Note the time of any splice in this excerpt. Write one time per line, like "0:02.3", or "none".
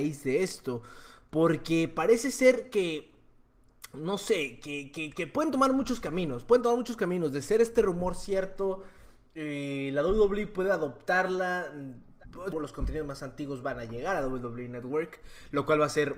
0:12.5